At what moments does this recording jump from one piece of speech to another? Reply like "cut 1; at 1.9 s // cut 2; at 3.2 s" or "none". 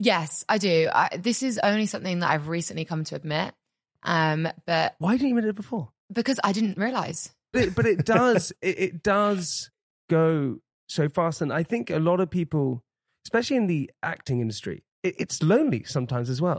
cut 1; at 6.0 s // cut 2; at 7.5 s // cut 3; at 14.9 s